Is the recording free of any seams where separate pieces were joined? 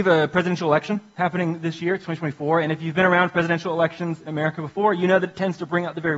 yes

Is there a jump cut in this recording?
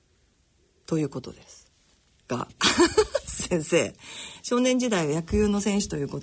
no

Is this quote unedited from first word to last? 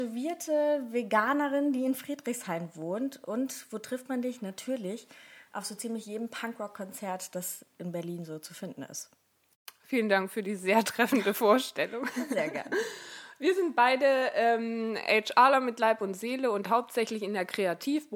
yes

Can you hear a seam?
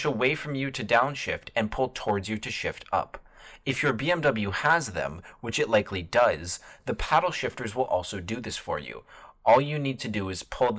no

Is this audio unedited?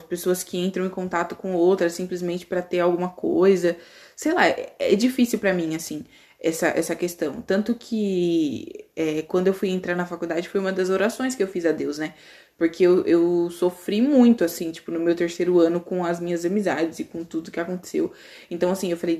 yes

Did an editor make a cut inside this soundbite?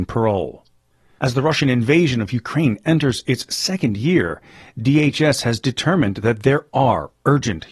yes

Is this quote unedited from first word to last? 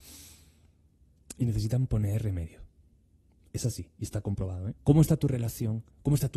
no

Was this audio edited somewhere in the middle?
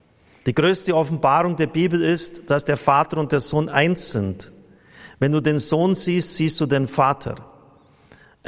no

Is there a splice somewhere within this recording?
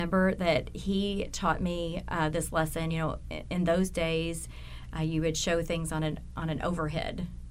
no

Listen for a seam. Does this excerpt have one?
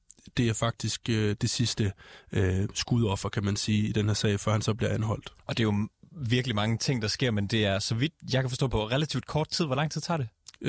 no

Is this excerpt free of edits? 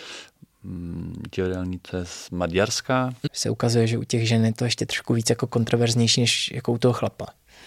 no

